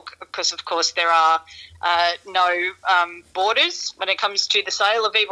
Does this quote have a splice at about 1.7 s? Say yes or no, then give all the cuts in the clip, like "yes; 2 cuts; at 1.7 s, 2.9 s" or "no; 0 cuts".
no; 0 cuts